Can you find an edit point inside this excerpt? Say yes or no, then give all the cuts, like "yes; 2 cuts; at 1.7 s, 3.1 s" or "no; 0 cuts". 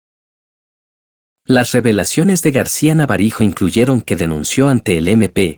no; 0 cuts